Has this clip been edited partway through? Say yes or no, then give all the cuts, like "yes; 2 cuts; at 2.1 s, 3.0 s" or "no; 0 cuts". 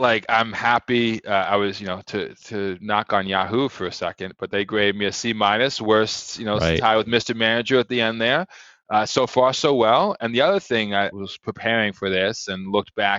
yes; 1 cut; at 11.1 s